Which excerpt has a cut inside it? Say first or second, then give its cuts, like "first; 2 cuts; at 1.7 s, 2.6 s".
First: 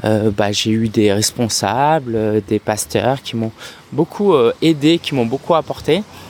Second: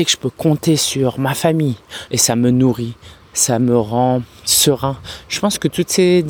second; 1 cut; at 2.1 s